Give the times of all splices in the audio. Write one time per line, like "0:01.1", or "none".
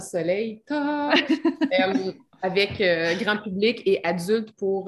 none